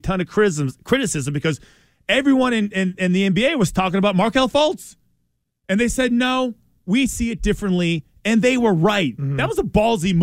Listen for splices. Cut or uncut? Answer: uncut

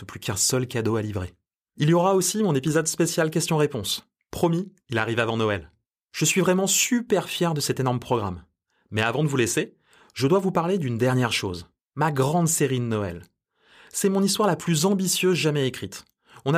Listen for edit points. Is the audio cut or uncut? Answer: uncut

